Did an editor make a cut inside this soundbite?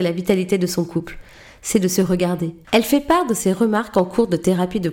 yes; 1 cut; at 2.6 s

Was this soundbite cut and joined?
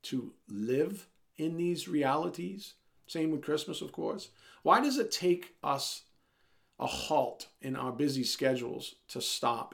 yes; 1 cut; at 3.0 s

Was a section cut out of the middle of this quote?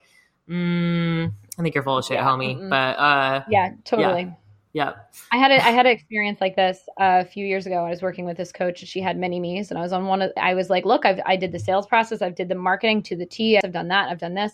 yes; 2 cuts; at 10.4 s, 13.6 s

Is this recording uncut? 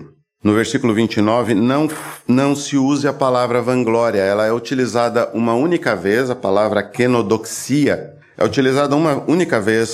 yes; 0 cuts

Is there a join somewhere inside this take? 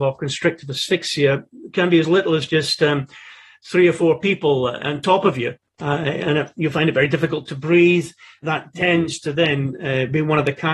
yes; 1 cut; at 8.4 s

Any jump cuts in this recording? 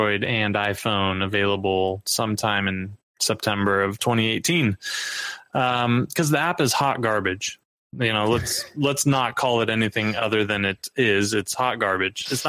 no; 0 cuts

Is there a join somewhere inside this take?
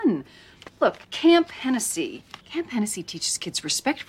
yes; 2 cuts; at 1.0 s, 2.4 s

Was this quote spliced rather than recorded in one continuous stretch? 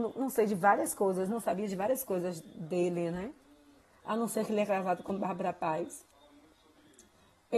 no; 0 cuts

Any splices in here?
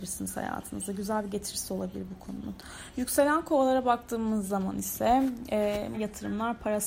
yes; 1 cut; at 5.9 s

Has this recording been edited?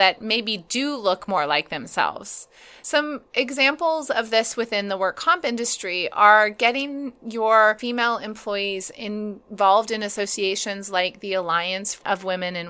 no; 0 cuts

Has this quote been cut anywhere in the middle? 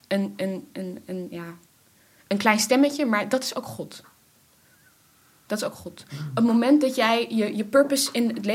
no; 0 cuts

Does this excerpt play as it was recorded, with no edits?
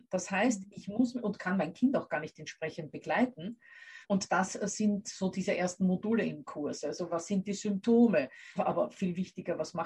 no; 2 cuts; at 4.0 s, 8.6 s

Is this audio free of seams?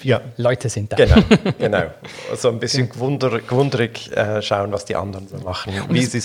yes; 0 cuts

